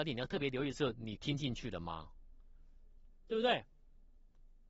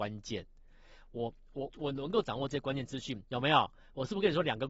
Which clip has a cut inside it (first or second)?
second